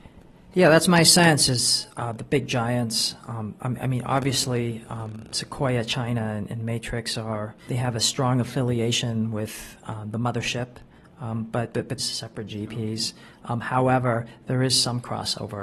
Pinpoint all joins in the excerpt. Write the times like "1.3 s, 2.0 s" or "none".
7.7 s, 12.0 s